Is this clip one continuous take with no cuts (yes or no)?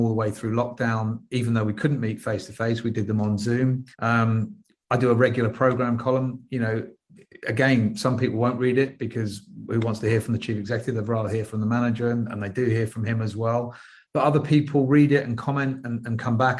no